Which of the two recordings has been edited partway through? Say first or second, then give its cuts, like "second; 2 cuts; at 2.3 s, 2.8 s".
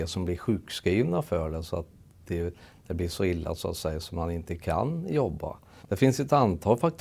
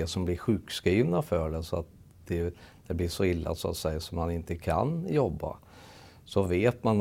first; 1 cut; at 5.8 s